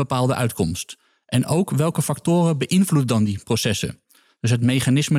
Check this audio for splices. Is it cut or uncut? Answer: uncut